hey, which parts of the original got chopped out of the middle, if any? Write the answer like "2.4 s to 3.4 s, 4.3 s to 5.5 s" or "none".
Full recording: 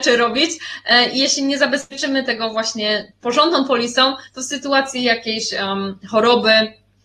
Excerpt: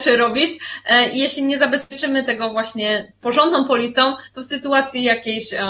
none